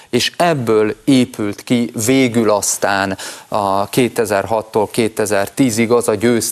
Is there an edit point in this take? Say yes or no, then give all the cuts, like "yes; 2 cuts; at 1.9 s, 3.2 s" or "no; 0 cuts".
no; 0 cuts